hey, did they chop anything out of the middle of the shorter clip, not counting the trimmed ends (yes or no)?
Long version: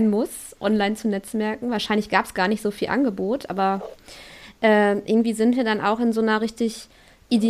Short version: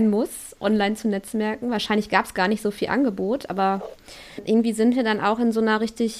yes